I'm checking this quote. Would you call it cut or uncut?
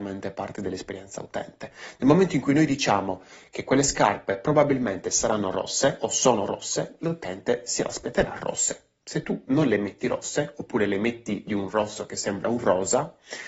uncut